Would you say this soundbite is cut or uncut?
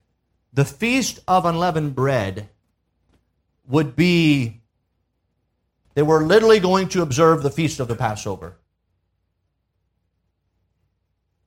cut